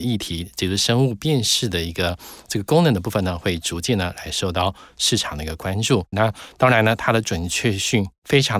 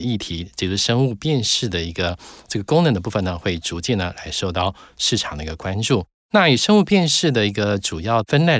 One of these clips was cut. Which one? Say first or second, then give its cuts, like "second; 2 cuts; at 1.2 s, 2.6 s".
first; 1 cut; at 6.1 s